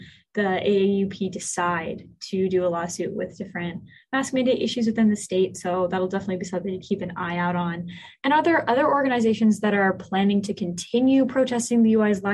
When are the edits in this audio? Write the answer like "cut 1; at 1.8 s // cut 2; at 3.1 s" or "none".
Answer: none